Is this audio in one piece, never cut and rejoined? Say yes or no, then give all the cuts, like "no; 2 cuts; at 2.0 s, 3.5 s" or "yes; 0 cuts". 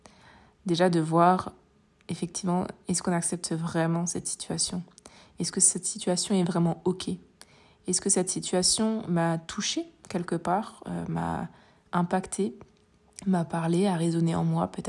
yes; 0 cuts